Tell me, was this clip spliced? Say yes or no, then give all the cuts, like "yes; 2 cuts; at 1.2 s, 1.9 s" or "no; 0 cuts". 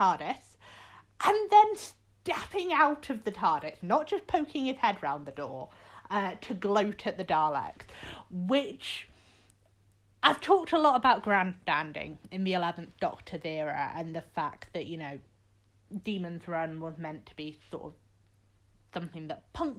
yes; 1 cut; at 3.8 s